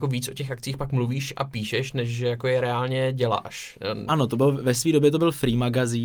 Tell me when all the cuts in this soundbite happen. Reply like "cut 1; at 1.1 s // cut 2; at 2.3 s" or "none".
cut 1; at 4.1 s